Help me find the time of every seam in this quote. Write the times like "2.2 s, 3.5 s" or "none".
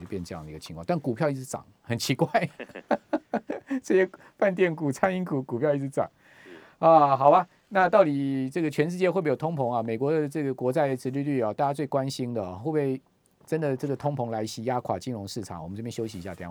none